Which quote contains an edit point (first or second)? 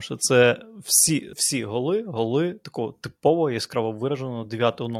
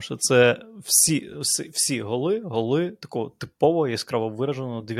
first